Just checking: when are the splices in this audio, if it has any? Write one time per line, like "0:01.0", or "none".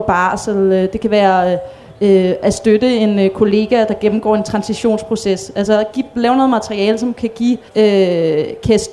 0:07.7